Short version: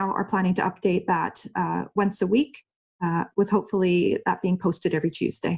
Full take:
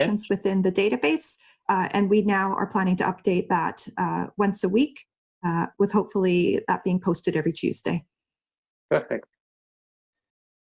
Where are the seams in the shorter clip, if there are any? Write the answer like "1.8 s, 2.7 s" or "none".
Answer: none